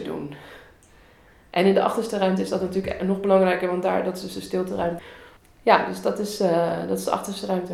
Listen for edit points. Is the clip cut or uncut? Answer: cut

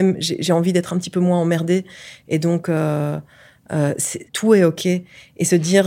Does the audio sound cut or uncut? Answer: cut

